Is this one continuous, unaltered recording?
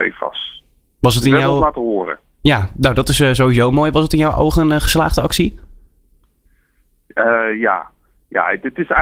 yes; 0 cuts

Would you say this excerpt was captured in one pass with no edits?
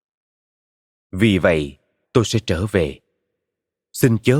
no; 1 cut; at 2.0 s

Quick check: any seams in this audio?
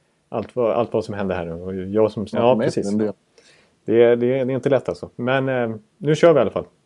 yes; 1 cut; at 2.3 s

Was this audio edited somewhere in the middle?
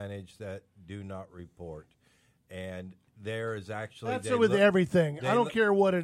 no; 0 cuts

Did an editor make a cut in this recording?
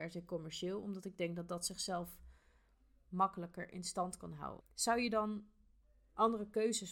yes; 1 cut; at 4.6 s

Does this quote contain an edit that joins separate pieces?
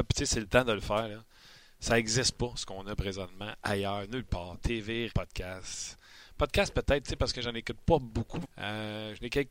yes; 2 cuts; at 5.1 s, 8.4 s

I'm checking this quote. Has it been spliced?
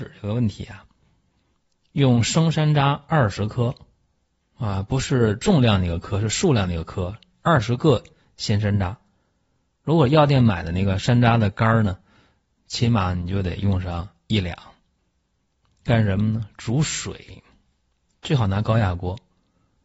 no; 0 cuts

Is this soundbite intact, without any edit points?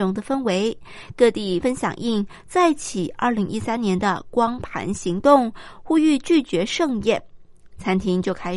no; 1 cut; at 1.6 s

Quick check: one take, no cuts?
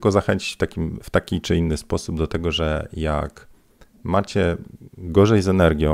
no; 1 cut; at 1.0 s

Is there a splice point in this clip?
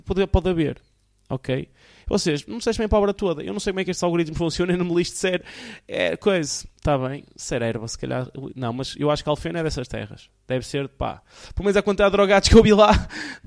no; 0 cuts

